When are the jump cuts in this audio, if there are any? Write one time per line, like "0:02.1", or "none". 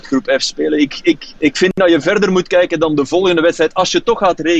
0:01.4